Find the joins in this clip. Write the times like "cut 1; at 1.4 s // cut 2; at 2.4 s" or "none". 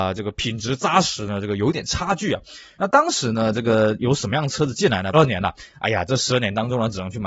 cut 1; at 2.8 s // cut 2; at 5.1 s